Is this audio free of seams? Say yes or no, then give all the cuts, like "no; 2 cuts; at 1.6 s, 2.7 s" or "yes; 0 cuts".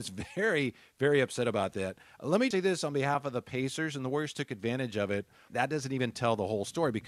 no; 2 cuts; at 2.5 s, 5.5 s